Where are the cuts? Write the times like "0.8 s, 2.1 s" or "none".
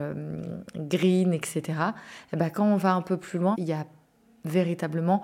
3.5 s